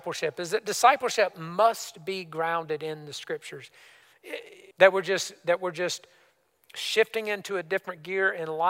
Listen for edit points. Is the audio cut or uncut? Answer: cut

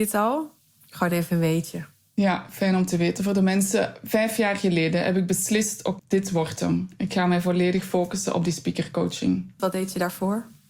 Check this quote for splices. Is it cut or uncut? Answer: cut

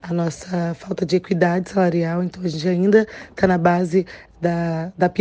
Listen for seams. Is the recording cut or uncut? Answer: uncut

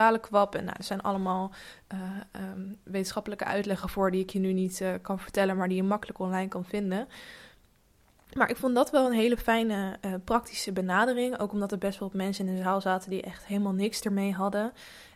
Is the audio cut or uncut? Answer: uncut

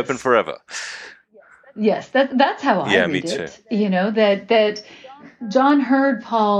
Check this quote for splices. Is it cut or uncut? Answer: uncut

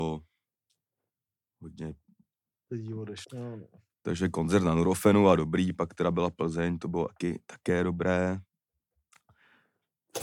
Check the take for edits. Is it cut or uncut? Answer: cut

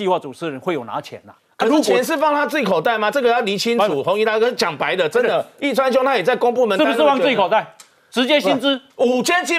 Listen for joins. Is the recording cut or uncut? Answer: uncut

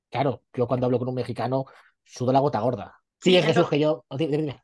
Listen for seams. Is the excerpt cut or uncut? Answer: cut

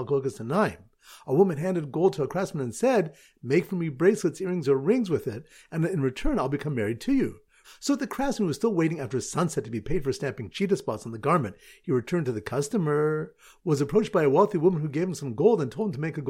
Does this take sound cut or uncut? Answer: cut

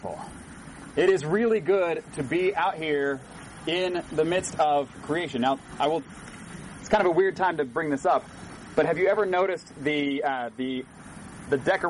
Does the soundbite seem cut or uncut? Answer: uncut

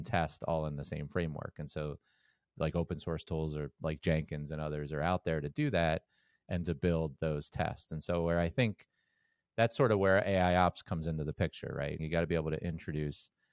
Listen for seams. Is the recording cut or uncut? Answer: cut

